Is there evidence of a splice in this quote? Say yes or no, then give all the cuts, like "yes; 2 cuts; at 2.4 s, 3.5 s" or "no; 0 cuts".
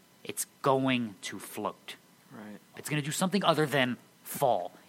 yes; 1 cut; at 2.7 s